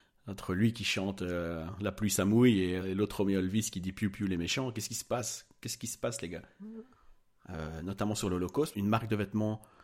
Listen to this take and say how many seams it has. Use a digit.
3